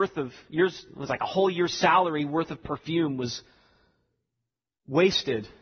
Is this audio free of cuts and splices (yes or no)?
yes